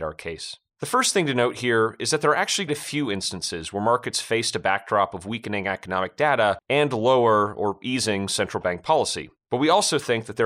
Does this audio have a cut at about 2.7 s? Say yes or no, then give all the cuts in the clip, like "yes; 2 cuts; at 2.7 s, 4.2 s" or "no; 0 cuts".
yes; 2 cuts; at 2.7 s, 9.4 s